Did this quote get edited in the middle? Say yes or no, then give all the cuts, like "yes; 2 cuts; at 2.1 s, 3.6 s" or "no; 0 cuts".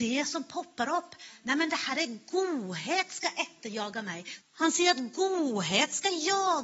yes; 1 cut; at 4.4 s